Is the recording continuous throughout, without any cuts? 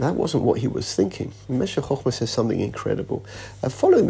yes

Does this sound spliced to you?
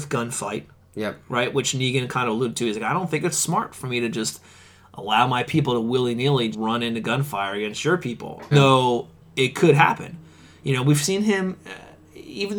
yes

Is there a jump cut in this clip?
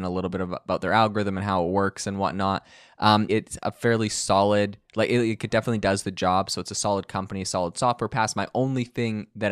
yes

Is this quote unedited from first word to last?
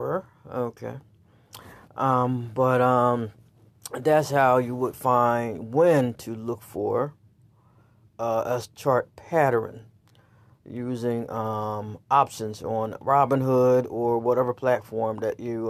yes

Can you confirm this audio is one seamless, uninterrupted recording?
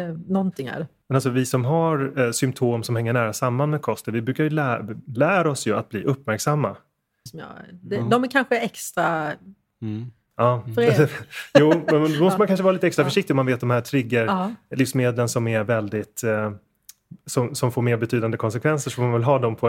no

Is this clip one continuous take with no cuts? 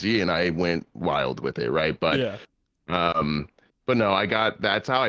yes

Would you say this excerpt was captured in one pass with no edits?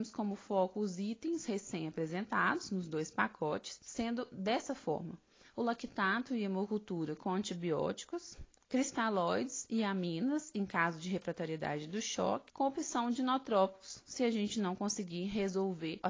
yes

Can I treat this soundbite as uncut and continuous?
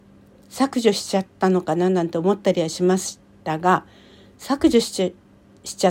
yes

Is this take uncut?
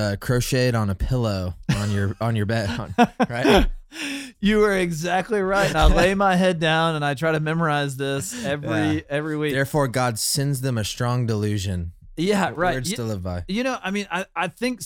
yes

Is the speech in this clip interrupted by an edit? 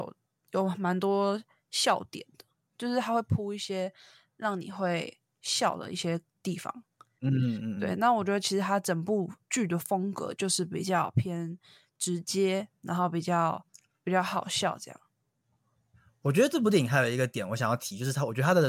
no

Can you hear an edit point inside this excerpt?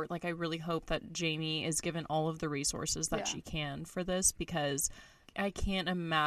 yes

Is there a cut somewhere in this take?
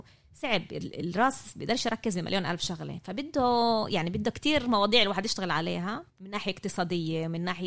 yes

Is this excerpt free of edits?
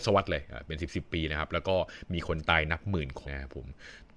no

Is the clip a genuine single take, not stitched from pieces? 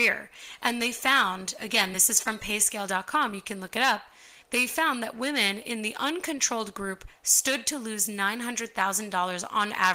yes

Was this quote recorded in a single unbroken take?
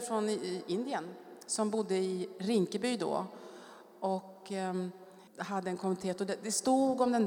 no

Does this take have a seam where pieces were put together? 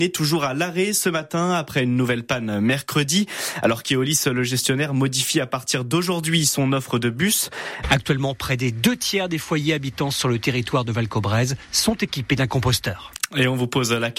yes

